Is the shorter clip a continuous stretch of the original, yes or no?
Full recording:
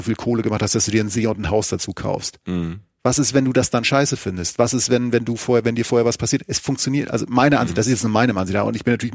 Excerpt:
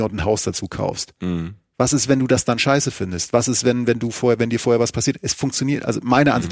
yes